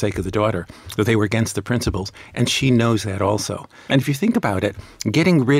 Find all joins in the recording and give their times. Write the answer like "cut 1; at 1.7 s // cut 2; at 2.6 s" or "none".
cut 1; at 3.9 s